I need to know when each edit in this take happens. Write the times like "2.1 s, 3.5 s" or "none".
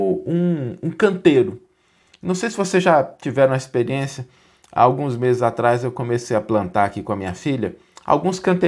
none

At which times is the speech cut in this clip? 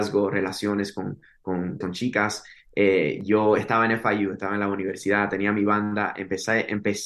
1.8 s

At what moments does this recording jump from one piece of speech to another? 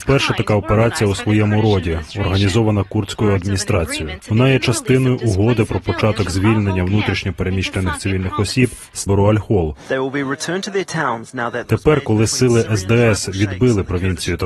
9.1 s, 11.6 s

